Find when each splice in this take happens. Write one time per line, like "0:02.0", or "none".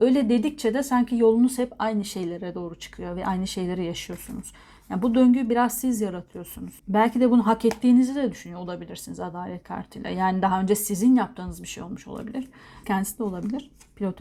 0:06.8
0:12.8

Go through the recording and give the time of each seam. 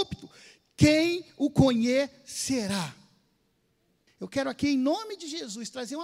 0:04.1

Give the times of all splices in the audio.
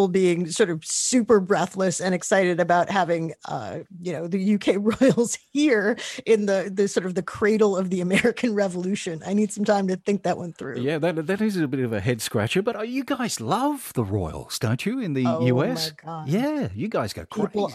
none

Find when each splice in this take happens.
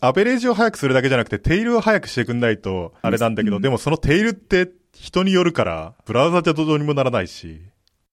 0:03.0

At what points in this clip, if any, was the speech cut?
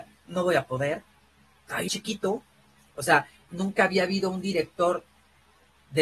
0:01.9
0:03.4

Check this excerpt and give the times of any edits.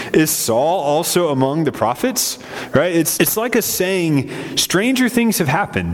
0:03.2

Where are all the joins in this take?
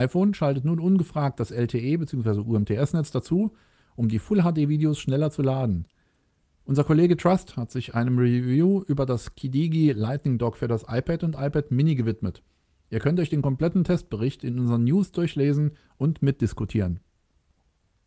0:06.4

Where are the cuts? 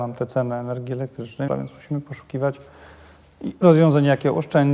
0:01.5

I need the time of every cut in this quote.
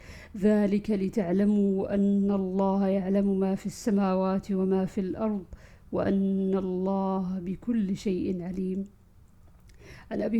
none

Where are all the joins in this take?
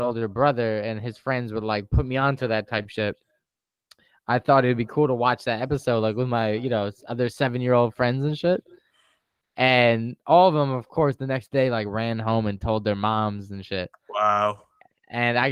none

